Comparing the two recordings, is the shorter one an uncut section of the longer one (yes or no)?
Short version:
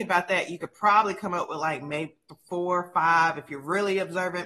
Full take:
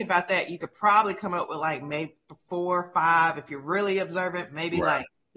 yes